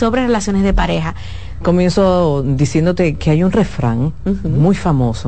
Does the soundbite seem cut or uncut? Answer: cut